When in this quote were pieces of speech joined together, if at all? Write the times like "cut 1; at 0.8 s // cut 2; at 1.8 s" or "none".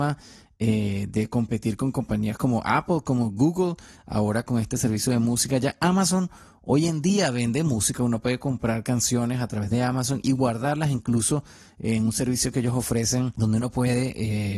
cut 1; at 4.0 s